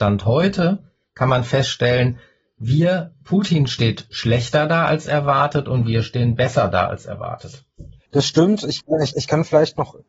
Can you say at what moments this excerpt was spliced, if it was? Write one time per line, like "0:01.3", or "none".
0:08.1
0:09.1